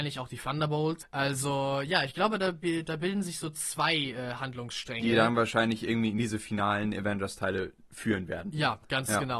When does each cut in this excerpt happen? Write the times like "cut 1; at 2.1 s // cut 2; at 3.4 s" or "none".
cut 1; at 1.0 s

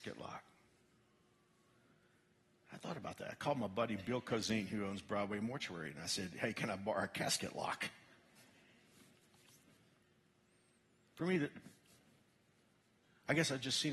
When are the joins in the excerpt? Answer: none

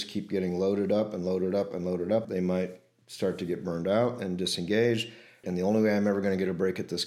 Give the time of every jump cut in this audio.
cut 1; at 2.2 s // cut 2; at 5.4 s

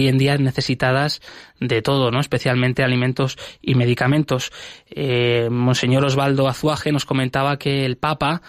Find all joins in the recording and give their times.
none

